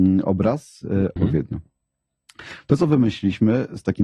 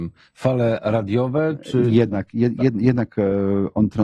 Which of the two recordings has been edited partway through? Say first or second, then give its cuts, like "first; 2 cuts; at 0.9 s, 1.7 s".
first; 1 cut; at 1.2 s